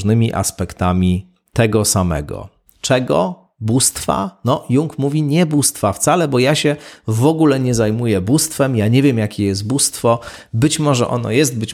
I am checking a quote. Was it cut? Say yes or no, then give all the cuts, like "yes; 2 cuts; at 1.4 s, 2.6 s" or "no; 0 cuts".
no; 0 cuts